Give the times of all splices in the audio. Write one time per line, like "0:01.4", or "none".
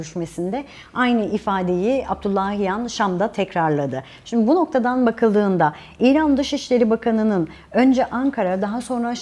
none

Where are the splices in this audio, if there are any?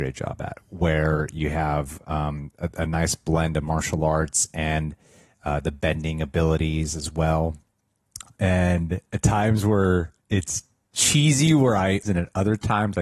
0:08.4
0:10.2
0:12.0

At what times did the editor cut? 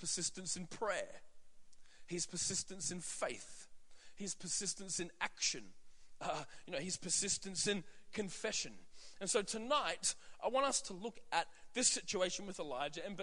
none

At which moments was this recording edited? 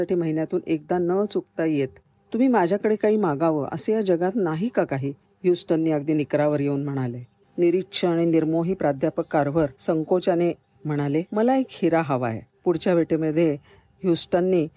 0:09.8
0:11.3

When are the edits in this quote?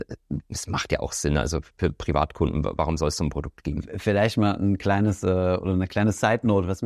none

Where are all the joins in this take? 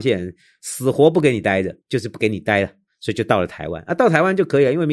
0:01.8

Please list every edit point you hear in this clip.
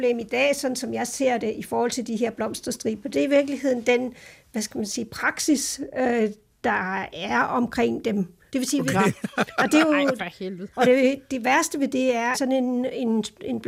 0:08.5
0:10.7
0:12.3

